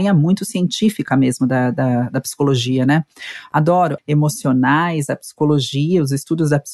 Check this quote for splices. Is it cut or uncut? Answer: cut